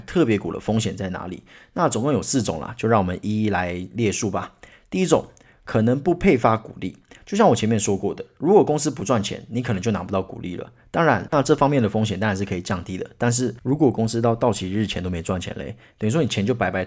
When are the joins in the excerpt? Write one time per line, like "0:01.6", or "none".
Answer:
0:11.3

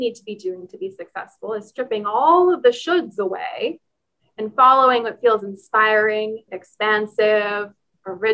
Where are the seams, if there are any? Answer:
0:06.5

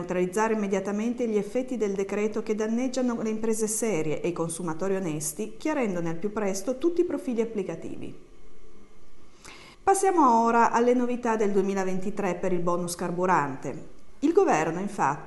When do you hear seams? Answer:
0:09.7

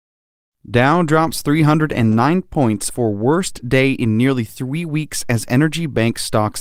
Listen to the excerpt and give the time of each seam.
0:02.9

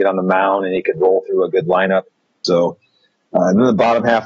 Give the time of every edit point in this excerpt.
0:02.4

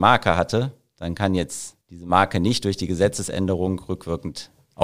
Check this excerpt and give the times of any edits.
0:01.8

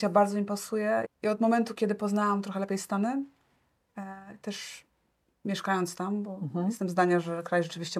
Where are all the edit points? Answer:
0:01.1

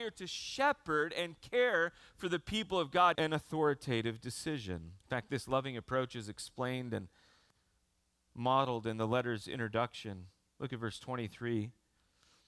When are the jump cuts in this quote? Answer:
0:03.2
0:05.0

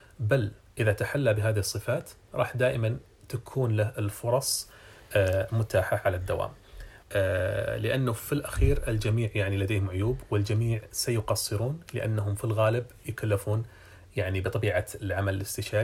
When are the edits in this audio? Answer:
0:07.0

